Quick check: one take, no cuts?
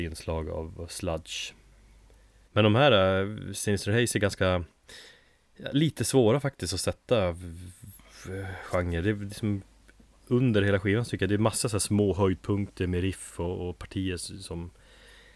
no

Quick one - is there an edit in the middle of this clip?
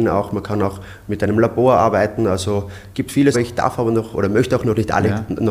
yes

